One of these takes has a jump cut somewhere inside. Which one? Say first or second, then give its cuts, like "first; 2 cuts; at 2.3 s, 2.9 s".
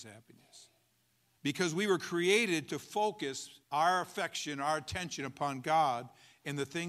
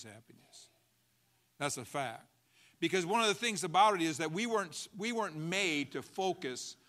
first; 2 cuts; at 1.4 s, 3.6 s